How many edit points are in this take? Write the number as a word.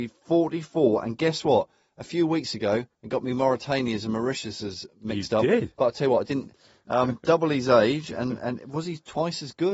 two